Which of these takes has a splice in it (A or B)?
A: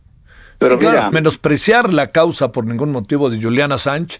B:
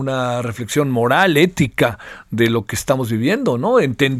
A